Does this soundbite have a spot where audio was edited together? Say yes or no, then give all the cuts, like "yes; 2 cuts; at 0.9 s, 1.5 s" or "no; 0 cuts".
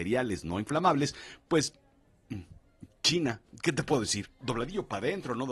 yes; 1 cut; at 4.4 s